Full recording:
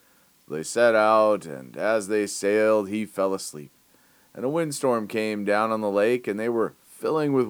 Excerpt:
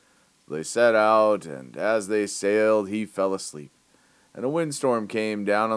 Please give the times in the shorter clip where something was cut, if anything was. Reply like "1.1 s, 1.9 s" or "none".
none